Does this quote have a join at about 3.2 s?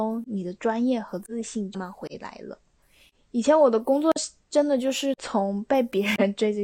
no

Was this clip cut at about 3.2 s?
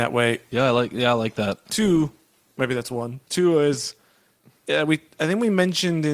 yes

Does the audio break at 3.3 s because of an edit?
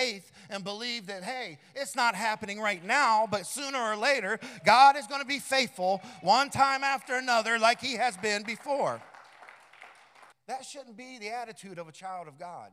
no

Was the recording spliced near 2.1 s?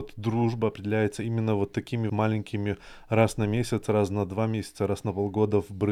yes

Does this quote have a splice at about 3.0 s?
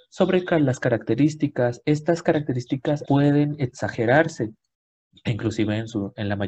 yes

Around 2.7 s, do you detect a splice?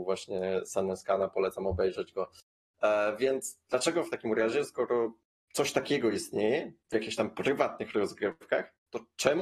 no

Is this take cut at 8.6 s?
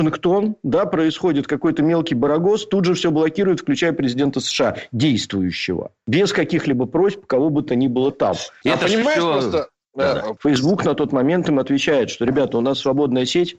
yes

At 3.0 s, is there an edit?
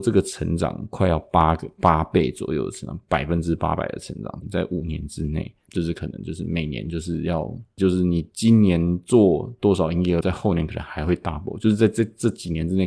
no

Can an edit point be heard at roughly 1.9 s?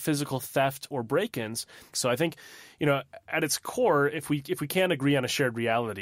yes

